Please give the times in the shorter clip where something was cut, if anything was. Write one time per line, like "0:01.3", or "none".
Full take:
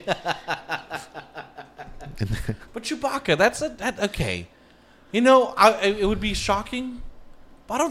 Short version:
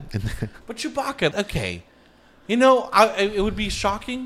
0:01.3